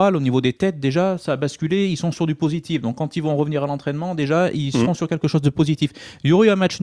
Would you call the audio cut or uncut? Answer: uncut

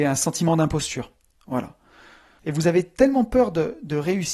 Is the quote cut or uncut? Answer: cut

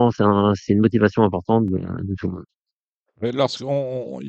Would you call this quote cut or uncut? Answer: uncut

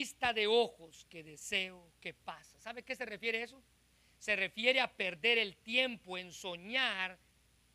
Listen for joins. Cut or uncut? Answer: uncut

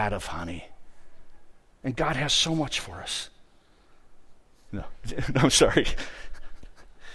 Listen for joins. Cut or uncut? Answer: cut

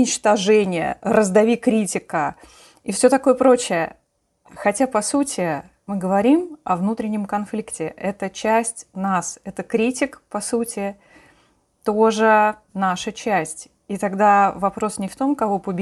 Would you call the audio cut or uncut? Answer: uncut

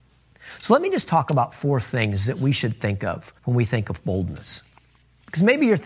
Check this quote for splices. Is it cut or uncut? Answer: cut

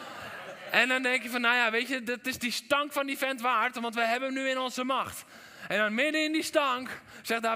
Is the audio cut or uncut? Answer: uncut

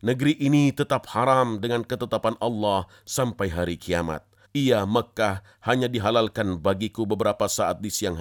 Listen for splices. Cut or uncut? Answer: cut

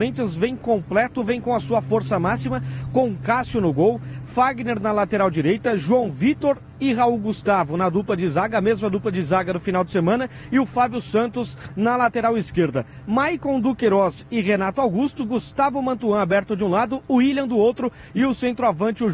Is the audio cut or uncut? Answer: uncut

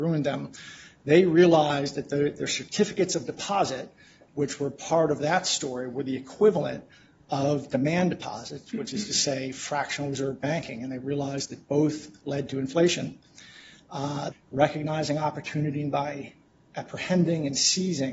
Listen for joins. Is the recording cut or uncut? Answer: cut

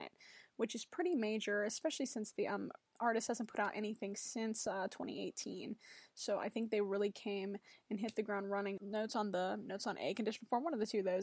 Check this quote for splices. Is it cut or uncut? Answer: cut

